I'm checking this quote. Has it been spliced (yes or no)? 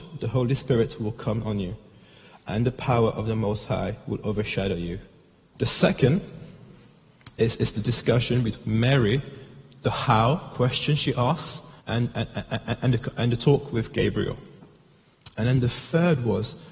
yes